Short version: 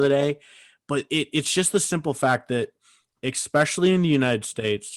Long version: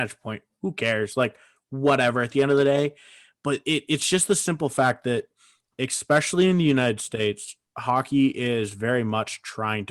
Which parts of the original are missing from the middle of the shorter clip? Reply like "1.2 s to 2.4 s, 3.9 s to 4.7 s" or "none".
none